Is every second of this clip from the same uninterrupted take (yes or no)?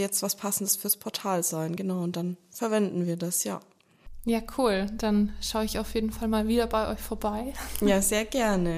yes